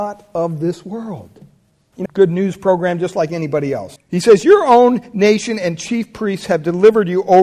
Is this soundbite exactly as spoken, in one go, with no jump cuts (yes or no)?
no